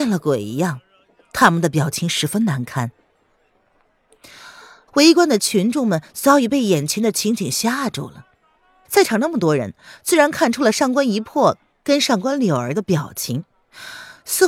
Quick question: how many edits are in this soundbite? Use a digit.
2